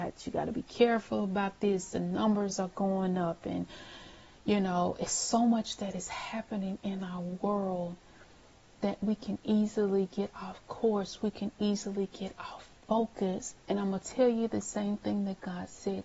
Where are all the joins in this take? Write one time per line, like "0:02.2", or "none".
0:13.6